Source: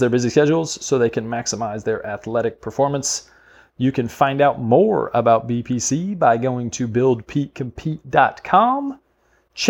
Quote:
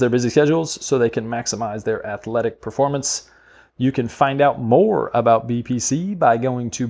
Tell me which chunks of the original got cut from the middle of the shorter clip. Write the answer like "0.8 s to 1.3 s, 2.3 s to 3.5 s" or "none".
none